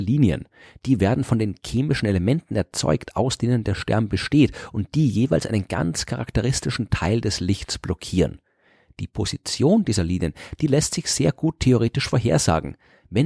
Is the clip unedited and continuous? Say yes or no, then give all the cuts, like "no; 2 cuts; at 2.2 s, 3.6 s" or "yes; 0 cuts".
yes; 0 cuts